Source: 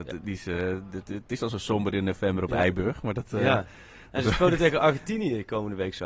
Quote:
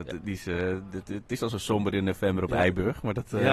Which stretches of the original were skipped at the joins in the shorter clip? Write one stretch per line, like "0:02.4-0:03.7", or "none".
none